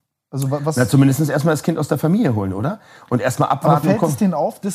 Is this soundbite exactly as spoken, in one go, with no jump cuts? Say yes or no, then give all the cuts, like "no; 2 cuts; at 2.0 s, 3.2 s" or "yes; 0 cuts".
yes; 0 cuts